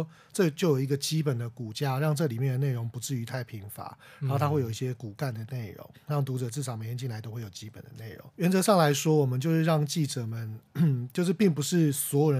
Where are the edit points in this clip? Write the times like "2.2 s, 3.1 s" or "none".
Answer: 8.3 s